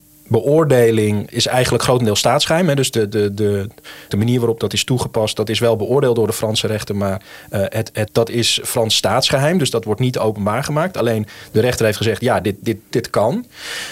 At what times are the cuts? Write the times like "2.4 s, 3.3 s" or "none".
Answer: 4.1 s, 8.1 s, 12.9 s